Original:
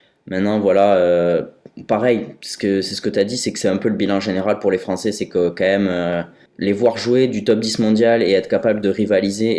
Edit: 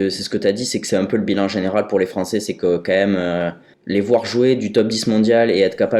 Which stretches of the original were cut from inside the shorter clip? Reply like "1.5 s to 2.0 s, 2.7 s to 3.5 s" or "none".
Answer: none